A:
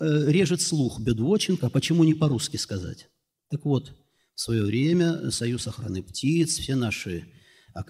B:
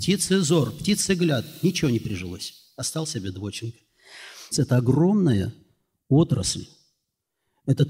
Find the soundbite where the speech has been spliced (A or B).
B